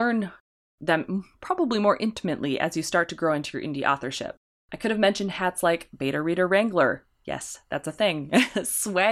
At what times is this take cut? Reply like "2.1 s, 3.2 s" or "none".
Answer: none